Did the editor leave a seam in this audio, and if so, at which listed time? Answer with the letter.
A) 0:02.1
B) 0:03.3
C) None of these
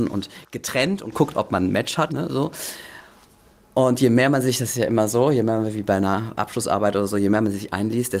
A